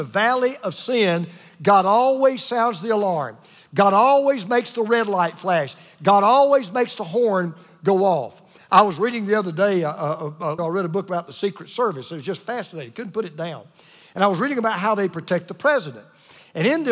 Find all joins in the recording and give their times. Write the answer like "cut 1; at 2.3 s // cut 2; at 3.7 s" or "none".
cut 1; at 10.6 s